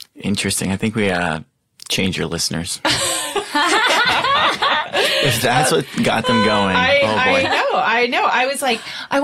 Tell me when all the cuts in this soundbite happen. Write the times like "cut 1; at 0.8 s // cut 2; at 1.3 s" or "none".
none